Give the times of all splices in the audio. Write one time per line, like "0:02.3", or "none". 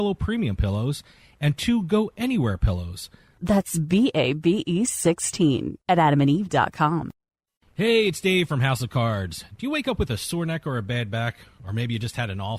0:03.4